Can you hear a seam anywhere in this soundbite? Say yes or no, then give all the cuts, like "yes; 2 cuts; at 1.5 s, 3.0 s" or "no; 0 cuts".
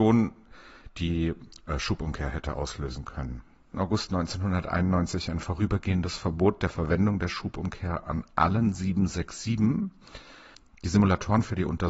yes; 1 cut; at 3.7 s